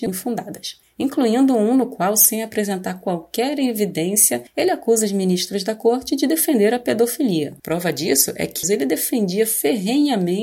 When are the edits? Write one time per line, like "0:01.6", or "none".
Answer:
0:07.6
0:08.6